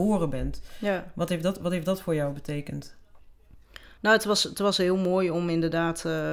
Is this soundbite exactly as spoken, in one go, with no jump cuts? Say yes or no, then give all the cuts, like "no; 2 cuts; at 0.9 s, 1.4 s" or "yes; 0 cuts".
yes; 0 cuts